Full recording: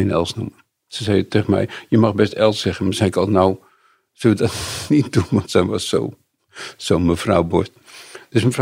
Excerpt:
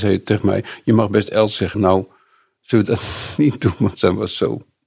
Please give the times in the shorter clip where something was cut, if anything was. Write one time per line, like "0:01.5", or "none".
0:01.7